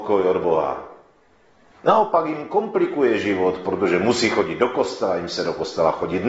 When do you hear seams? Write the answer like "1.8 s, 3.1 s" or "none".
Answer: 1.7 s